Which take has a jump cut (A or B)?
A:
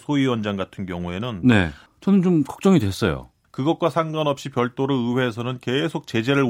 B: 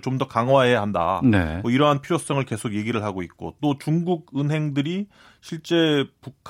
A